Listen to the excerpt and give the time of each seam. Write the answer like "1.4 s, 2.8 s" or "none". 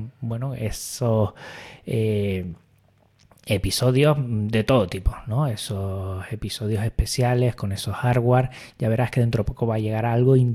none